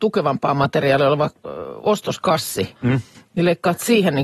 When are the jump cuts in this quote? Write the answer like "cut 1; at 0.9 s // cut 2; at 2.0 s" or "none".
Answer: cut 1; at 2.8 s

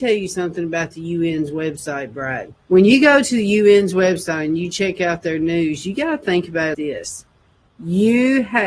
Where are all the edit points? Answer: cut 1; at 2.6 s // cut 2; at 6.7 s

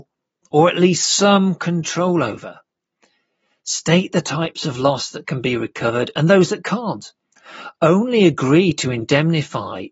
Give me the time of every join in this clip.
none

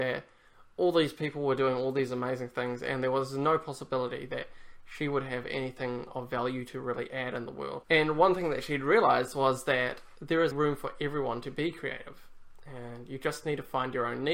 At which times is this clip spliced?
cut 1; at 7.8 s // cut 2; at 10.5 s

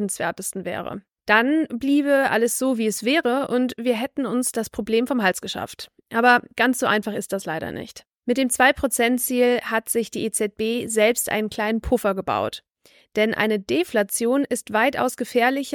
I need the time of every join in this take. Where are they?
none

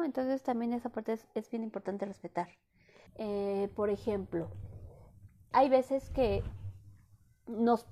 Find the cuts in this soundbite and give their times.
cut 1; at 3.1 s // cut 2; at 5.5 s

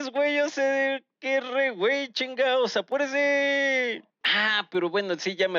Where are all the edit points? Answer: cut 1; at 4.2 s

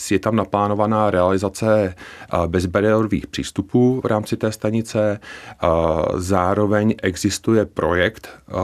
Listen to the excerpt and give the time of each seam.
none

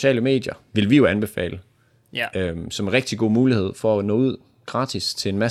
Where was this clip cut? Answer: none

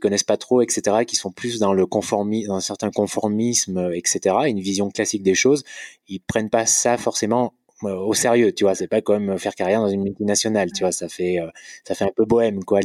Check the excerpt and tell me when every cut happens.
none

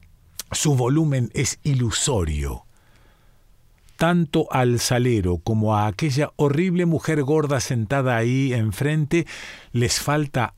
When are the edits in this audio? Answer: none

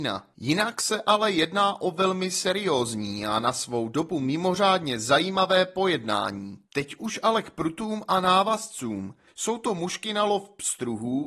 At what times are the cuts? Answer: cut 1; at 9.3 s

